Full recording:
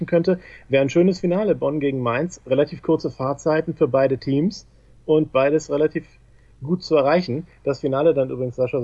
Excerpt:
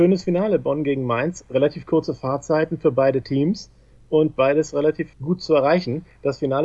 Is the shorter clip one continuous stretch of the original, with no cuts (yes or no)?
no